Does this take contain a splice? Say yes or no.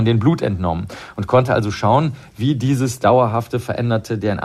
no